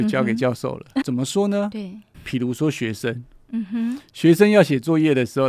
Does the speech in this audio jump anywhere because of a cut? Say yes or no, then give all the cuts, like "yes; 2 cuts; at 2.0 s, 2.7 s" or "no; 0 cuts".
yes; 1 cut; at 1.0 s